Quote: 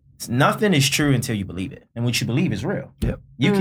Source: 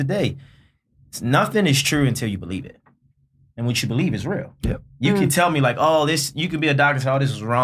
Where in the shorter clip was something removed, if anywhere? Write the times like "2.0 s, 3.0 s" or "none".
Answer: 1.9 s